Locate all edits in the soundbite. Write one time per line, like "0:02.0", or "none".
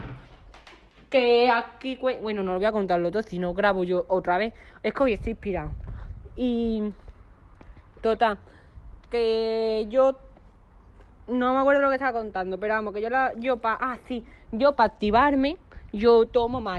none